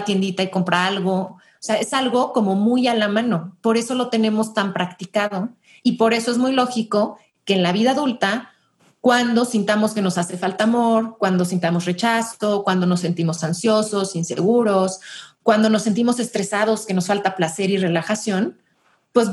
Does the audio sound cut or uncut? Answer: uncut